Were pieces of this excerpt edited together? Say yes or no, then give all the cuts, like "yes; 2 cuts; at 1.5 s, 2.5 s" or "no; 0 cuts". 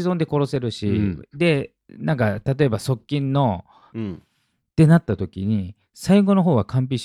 yes; 1 cut; at 3.9 s